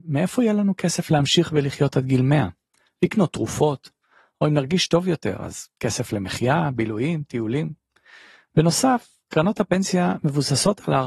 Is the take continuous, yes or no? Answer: yes